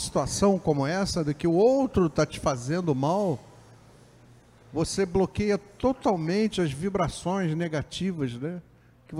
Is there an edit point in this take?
no; 0 cuts

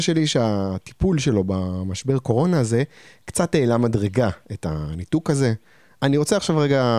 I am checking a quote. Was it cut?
yes; 1 cut; at 6.0 s

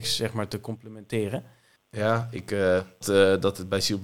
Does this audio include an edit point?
yes; 2 cuts; at 1.8 s, 3.0 s

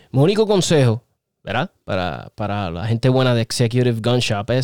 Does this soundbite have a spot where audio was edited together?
no; 0 cuts

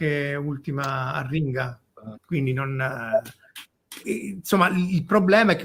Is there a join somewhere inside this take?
yes; 2 cuts; at 2.1 s, 4.0 s

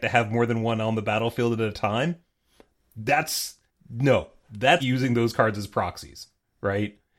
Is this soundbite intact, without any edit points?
no; 1 cut; at 4.8 s

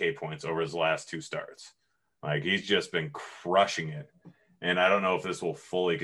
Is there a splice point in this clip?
no; 0 cuts

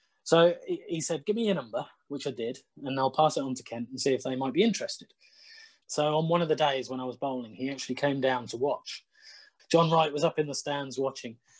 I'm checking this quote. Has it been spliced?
yes; 2 cuts; at 5.8 s, 9.6 s

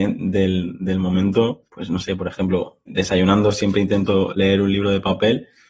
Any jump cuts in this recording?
yes; 2 cuts; at 1.7 s, 2.9 s

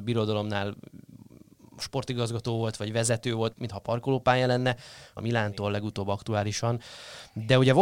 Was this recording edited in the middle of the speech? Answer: yes; 2 cuts; at 3.5 s, 5.2 s

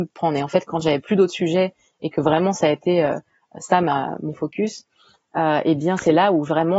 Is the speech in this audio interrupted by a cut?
no; 0 cuts

